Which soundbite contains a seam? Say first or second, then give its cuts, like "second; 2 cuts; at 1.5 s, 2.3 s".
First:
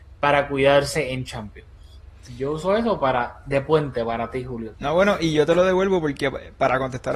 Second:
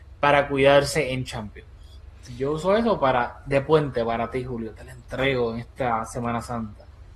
first; 1 cut; at 4.7 s